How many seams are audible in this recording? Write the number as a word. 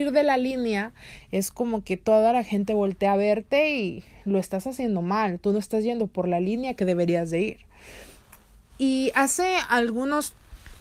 zero